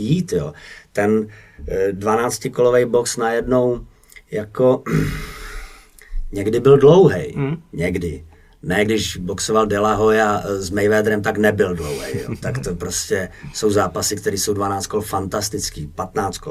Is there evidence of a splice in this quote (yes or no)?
no